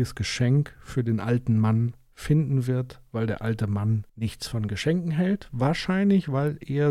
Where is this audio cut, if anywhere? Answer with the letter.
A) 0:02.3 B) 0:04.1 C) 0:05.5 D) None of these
B